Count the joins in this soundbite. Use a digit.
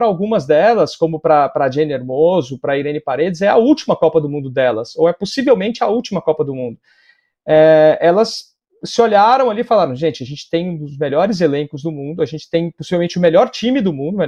0